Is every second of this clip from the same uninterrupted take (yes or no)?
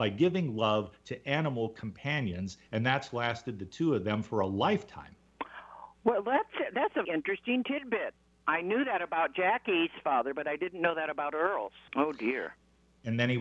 no